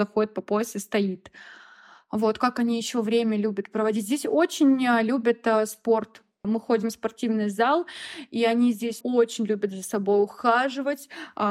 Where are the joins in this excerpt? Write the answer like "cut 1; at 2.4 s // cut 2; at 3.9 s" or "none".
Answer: cut 1; at 6.4 s // cut 2; at 9.0 s